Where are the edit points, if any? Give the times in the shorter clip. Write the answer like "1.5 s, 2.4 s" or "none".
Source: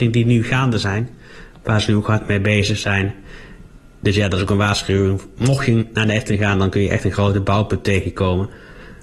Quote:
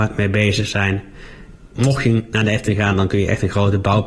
1.7 s